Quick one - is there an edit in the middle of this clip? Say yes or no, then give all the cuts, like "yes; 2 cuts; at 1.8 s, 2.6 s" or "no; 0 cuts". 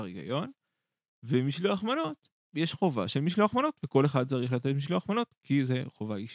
yes; 1 cut; at 2.4 s